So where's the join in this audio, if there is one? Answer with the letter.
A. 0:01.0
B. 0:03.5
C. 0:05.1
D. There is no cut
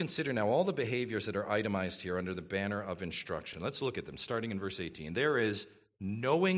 D